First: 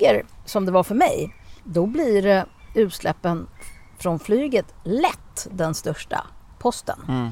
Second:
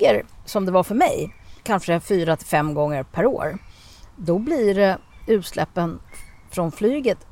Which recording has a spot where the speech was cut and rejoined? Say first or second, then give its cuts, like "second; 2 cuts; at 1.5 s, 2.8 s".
first; 1 cut; at 1.6 s